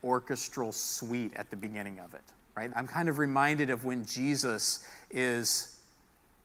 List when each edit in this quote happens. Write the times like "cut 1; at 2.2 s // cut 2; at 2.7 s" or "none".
cut 1; at 2.7 s